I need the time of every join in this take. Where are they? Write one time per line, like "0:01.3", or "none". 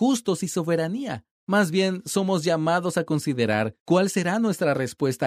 0:01.4

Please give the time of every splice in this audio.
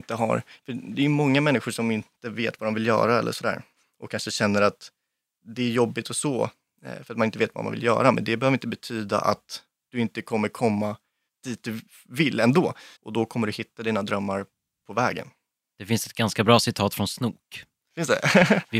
0:13.0

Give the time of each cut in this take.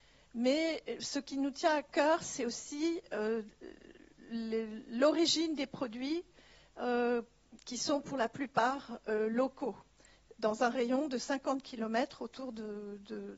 none

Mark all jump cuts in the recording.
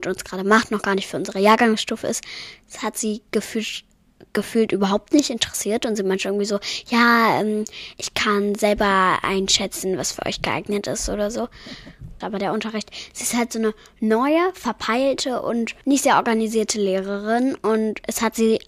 0:12.2
0:15.8

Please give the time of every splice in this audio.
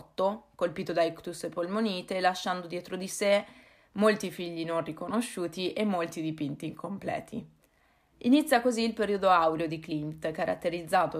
0:08.1

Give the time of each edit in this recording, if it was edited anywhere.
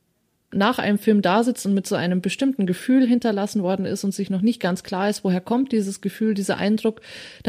none

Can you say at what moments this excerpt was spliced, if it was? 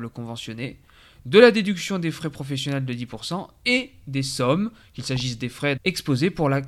0:05.8

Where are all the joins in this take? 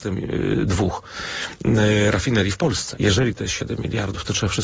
0:03.0

